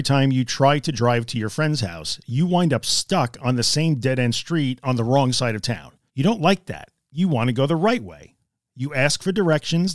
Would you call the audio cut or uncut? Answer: cut